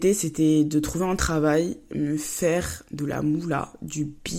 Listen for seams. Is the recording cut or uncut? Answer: uncut